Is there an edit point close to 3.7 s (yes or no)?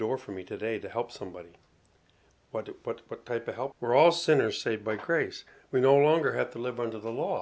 yes